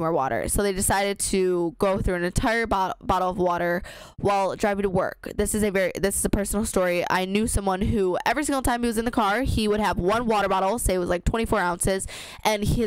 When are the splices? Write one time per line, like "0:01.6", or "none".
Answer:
none